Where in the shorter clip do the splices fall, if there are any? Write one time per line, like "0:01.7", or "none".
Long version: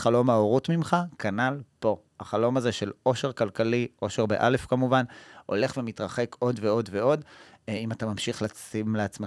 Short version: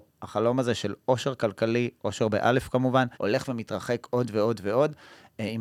0:03.1

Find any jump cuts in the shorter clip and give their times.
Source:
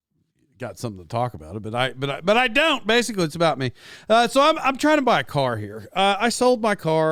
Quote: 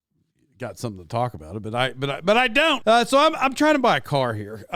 0:02.8

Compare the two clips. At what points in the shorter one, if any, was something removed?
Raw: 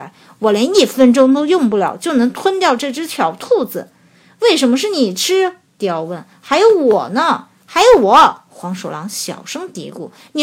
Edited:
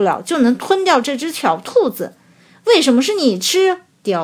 none

